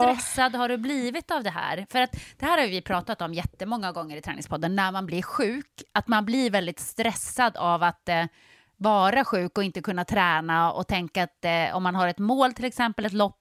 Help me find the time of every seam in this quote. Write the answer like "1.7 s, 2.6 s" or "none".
none